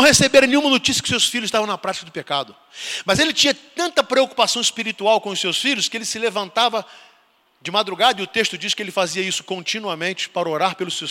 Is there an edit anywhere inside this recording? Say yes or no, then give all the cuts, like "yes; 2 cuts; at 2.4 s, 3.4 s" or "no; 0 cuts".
no; 0 cuts